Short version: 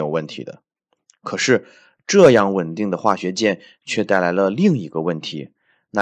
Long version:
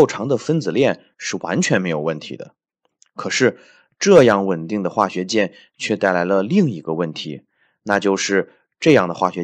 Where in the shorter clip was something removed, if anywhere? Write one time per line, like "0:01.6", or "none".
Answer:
none